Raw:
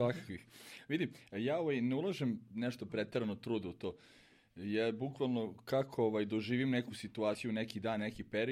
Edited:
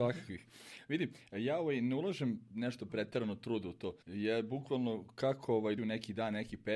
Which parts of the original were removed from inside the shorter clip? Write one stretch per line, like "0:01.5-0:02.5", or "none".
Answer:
0:04.0-0:04.5
0:06.3-0:07.4

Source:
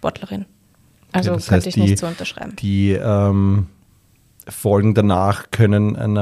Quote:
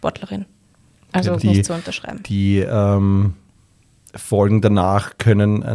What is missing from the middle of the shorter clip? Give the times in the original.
0:01.4-0:01.7

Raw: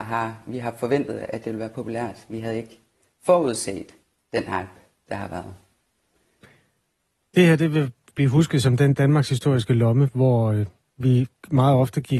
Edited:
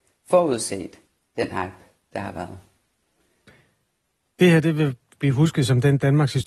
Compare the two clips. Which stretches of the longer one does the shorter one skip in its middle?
none

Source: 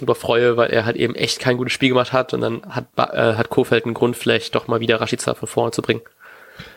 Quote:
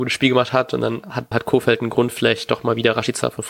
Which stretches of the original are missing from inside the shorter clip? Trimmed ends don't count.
0:02.9-0:03.4

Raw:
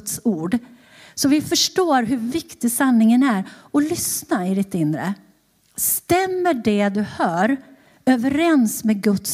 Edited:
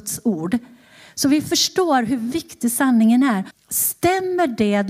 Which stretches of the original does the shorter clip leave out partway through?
0:03.5-0:05.6

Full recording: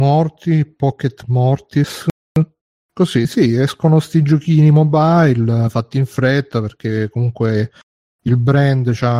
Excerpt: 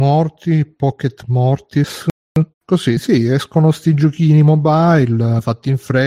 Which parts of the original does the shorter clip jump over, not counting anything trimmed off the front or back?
0:02.5-0:02.8

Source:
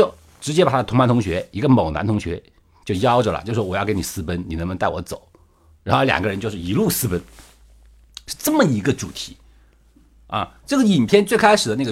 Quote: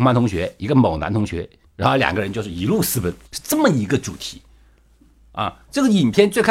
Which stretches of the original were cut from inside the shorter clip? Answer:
0:02.6-0:05.7
0:07.3-0:08.2

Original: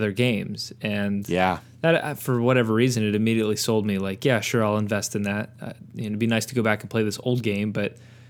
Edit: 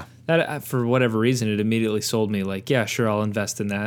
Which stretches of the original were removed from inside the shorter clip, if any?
none

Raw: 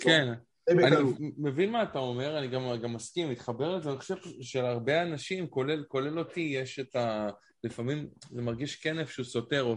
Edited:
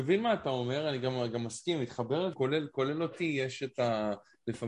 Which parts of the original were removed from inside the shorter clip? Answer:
0:03.8-0:05.5

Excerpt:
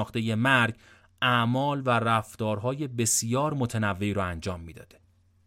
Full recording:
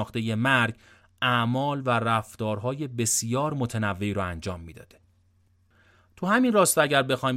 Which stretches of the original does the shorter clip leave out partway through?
none

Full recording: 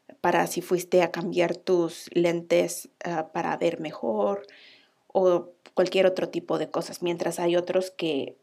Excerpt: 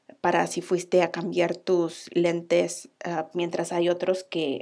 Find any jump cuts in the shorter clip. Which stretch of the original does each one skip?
0:03.3-0:07.0

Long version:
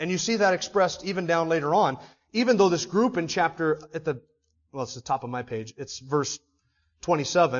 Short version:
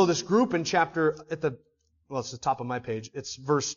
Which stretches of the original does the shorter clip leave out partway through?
none

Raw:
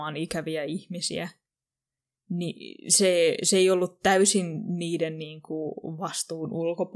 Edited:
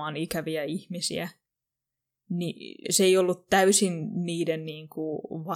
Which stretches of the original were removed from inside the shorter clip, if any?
0:02.8-0:03.4

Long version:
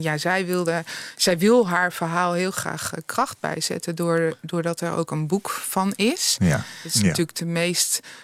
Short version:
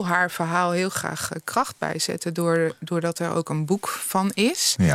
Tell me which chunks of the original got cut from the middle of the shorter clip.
none

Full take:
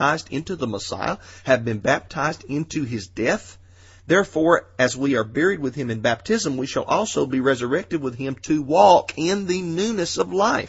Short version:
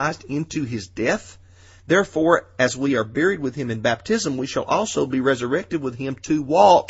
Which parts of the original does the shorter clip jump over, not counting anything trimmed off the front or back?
none

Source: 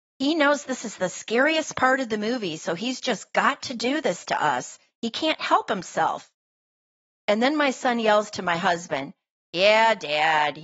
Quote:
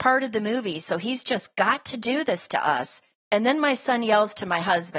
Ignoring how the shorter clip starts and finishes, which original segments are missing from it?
0:04.9-0:07.1

